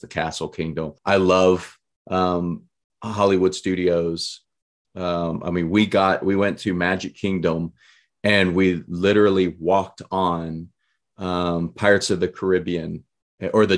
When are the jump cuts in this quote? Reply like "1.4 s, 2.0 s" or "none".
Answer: 1.0 s, 4.8 s